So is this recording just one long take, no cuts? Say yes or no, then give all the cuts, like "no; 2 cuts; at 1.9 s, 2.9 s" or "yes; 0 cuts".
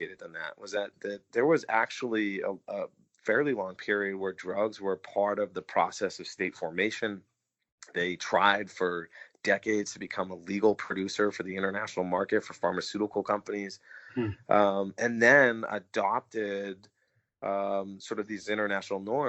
yes; 0 cuts